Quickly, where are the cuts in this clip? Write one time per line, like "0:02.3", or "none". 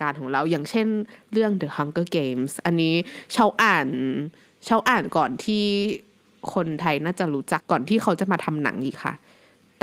0:07.6